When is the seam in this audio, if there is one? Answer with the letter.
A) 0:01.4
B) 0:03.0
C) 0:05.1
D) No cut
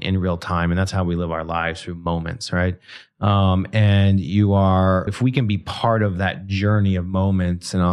C